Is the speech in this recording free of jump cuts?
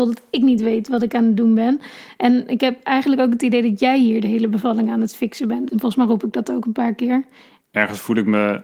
no; 2 cuts; at 5.7 s, 7.6 s

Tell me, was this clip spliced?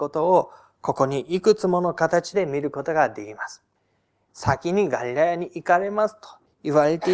yes; 1 cut; at 4.3 s

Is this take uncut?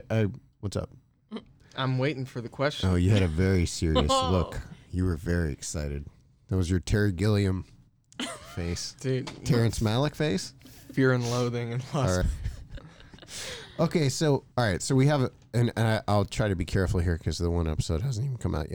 no; 2 cuts; at 12.2 s, 14.5 s

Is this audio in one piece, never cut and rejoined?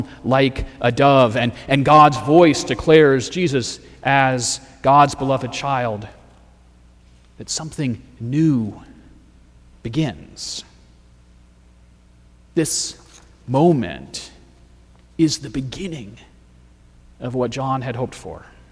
yes; 0 cuts

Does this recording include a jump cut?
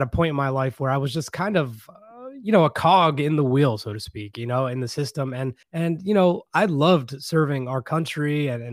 yes; 1 cut; at 5.6 s

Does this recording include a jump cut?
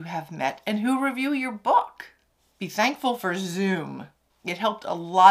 no; 0 cuts

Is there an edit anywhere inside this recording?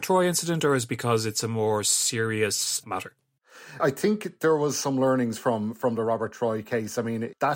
no; 0 cuts

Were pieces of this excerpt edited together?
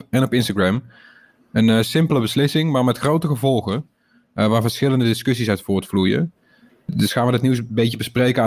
no; 0 cuts

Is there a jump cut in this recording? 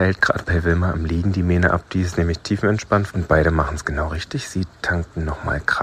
yes; 1 cut; at 3.1 s

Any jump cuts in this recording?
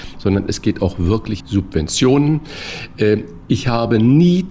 yes; 1 cut; at 1.4 s

